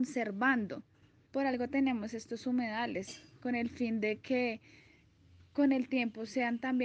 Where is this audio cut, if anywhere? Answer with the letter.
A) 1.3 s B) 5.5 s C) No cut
A